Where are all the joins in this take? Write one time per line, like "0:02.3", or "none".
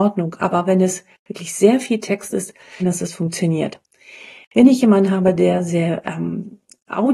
0:02.8